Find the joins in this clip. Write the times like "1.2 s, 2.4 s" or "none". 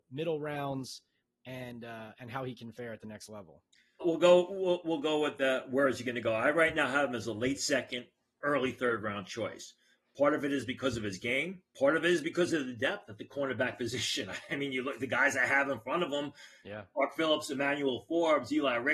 4.0 s